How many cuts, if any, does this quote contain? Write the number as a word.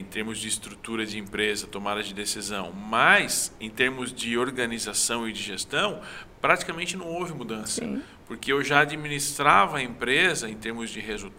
zero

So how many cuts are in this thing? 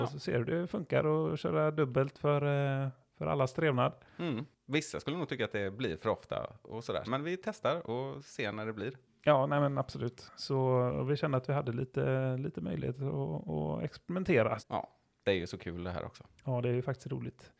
two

